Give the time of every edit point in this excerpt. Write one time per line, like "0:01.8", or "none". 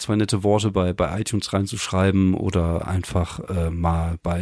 none